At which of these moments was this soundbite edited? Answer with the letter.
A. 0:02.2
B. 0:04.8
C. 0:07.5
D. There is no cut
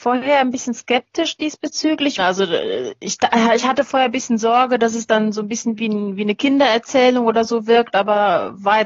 A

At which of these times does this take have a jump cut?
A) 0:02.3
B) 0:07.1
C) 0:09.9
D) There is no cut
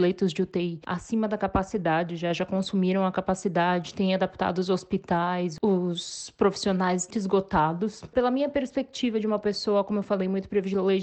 B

